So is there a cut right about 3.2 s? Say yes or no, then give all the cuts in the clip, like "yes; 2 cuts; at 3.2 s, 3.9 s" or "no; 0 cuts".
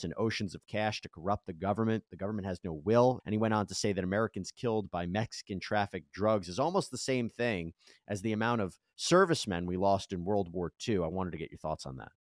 yes; 1 cut; at 3.2 s